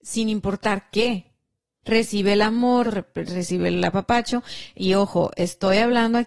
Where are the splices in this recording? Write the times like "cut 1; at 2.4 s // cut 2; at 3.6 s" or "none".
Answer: cut 1; at 1.8 s // cut 2; at 2.8 s